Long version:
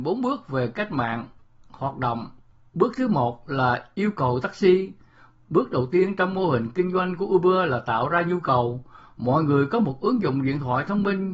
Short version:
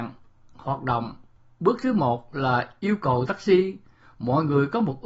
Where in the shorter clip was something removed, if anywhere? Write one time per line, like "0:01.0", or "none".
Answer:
0:04.1